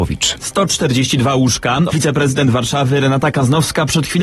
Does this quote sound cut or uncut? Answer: cut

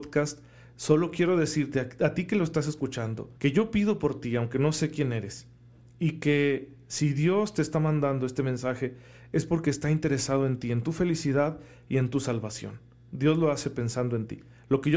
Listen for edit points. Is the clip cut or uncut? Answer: cut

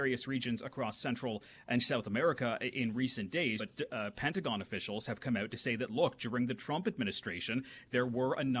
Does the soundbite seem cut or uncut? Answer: cut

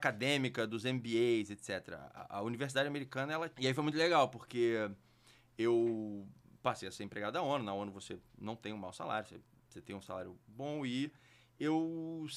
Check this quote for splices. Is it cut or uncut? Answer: cut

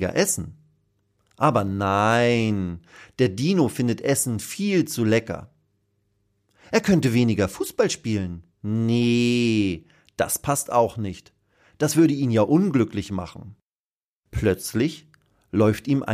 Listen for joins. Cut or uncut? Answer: cut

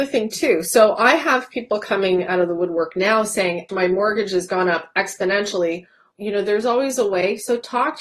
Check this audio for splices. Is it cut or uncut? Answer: cut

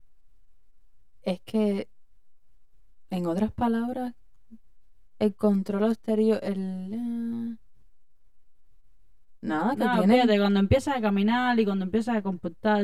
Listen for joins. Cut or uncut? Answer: uncut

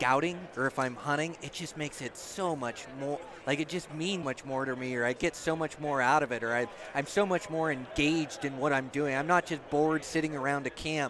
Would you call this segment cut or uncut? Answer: cut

